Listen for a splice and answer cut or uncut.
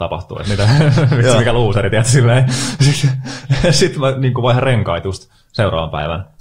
uncut